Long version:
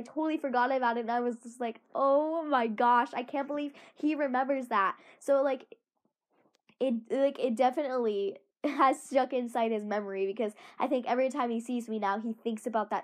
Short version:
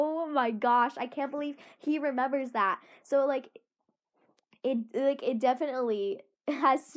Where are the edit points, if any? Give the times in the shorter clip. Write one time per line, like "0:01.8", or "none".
none